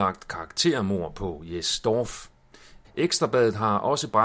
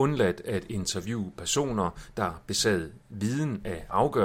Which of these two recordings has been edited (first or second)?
first